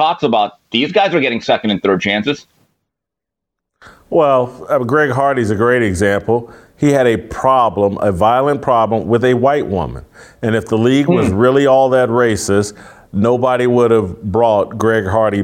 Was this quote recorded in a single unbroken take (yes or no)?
yes